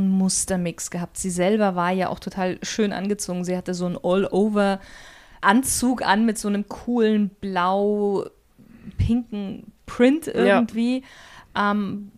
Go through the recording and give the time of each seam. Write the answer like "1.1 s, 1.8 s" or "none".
none